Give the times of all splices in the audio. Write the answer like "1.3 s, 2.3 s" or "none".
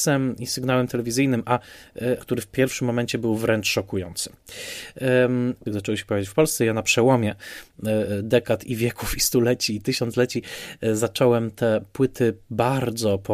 2.2 s, 5.7 s